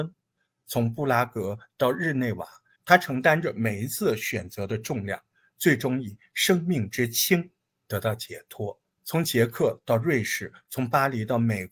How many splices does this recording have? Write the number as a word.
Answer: three